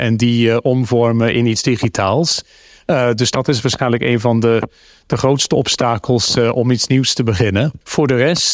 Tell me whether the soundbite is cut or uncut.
uncut